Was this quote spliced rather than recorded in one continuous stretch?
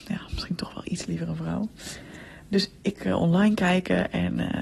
no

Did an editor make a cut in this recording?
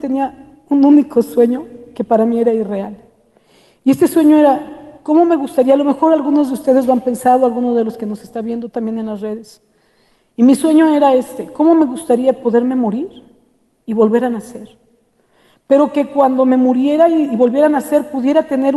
no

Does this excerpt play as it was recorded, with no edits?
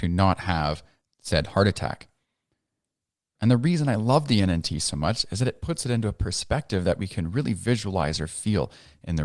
yes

